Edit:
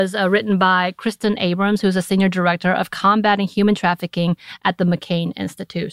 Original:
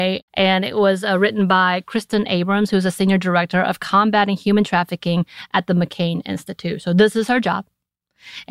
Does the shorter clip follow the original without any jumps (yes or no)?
yes